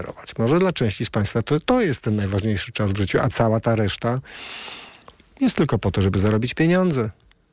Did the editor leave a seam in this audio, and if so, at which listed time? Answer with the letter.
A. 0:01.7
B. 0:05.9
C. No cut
A